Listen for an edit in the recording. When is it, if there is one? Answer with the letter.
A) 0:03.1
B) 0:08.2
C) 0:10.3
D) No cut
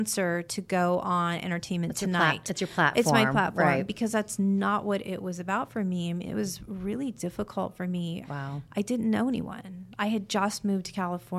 B